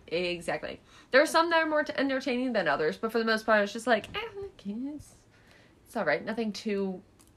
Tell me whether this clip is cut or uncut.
uncut